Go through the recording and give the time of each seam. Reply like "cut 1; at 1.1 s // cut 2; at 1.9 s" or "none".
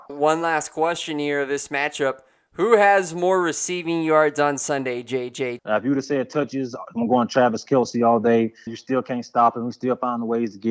cut 1; at 5.6 s // cut 2; at 8.7 s

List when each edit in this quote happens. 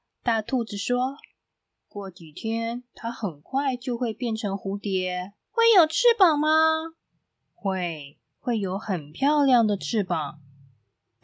cut 1; at 5.4 s // cut 2; at 7.0 s

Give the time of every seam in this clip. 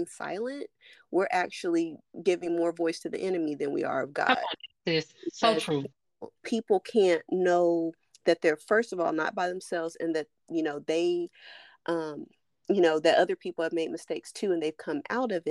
none

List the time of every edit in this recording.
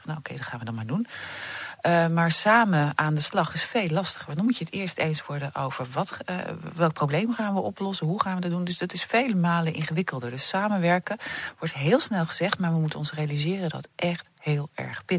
cut 1; at 13.7 s

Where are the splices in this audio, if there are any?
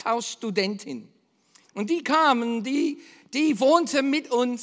cut 1; at 1.6 s

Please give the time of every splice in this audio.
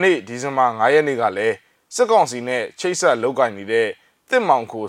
none

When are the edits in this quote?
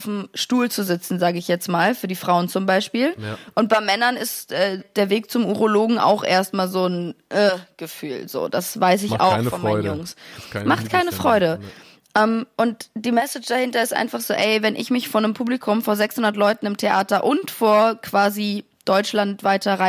cut 1; at 4.8 s

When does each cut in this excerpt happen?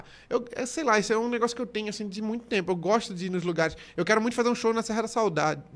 none

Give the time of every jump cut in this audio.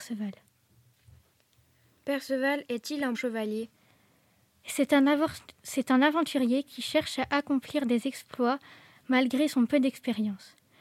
cut 1; at 3.1 s

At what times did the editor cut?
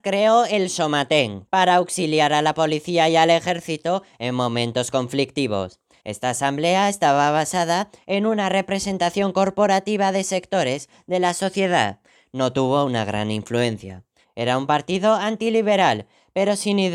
cut 1; at 1.5 s // cut 2; at 6.0 s // cut 3; at 14.2 s

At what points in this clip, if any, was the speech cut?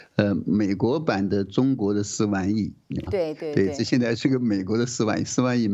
cut 1; at 3.1 s

